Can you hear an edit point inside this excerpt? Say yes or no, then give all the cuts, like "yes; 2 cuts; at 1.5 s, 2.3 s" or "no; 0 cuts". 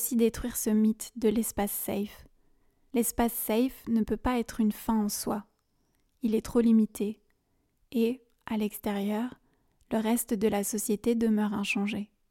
no; 0 cuts